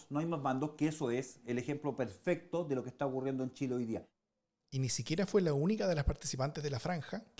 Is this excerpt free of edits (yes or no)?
yes